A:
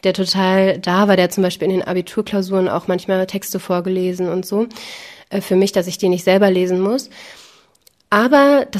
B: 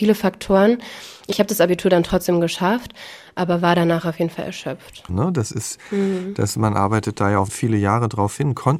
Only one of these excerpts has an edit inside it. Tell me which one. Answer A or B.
B